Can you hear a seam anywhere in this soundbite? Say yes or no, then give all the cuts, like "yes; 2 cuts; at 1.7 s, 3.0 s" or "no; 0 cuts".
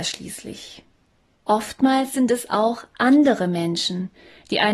yes; 1 cut; at 1.3 s